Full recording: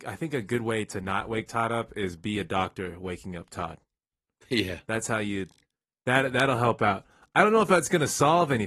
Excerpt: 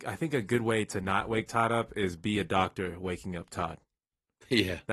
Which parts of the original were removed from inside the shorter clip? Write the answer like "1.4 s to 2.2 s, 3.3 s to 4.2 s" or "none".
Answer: none